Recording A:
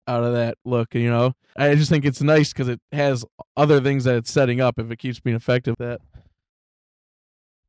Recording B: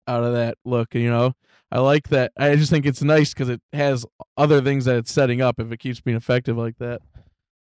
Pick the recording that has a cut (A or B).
A